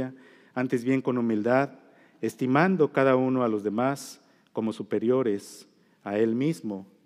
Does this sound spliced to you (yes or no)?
no